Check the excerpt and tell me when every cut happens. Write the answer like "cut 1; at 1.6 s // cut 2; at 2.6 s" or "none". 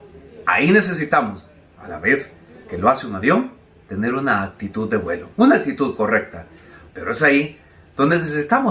cut 1; at 5.3 s // cut 2; at 6.9 s

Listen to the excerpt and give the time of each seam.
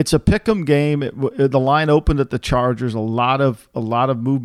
none

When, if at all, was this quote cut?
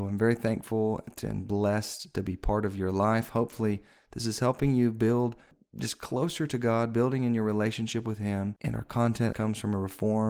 cut 1; at 9.3 s

